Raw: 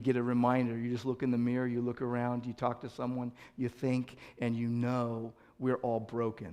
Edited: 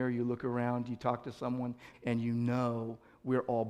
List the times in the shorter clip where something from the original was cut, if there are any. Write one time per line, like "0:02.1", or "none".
0:01.9